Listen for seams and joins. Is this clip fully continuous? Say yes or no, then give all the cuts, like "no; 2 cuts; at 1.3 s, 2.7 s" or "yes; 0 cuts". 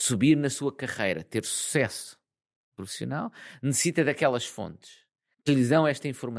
yes; 0 cuts